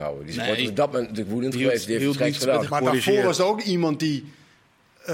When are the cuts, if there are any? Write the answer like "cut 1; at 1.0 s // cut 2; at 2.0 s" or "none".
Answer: cut 1; at 2.6 s